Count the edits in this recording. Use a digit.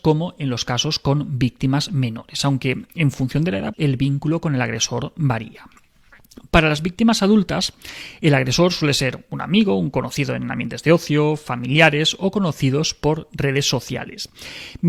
1